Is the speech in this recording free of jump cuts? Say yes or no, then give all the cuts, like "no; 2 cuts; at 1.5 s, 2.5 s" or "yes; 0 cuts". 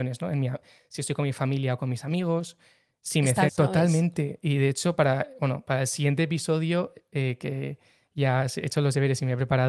no; 1 cut; at 3.5 s